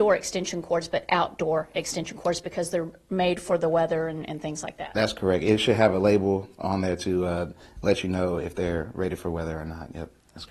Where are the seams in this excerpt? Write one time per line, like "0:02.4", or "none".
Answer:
none